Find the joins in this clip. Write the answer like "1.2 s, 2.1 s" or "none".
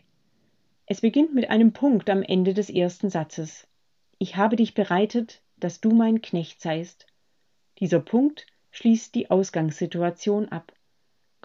none